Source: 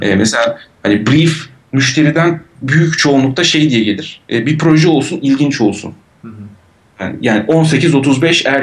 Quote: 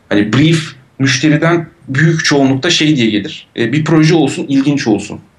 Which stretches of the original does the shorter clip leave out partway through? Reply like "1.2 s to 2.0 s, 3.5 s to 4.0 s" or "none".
none